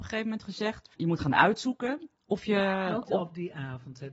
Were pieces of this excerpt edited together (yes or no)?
yes